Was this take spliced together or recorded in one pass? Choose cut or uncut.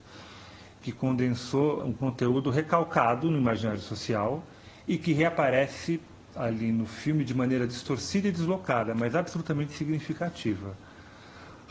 cut